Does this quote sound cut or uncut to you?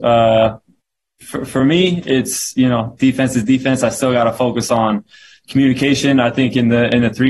uncut